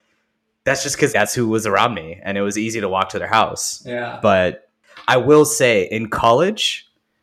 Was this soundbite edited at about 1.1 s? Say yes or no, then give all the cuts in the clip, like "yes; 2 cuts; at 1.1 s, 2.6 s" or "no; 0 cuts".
yes; 1 cut; at 1.1 s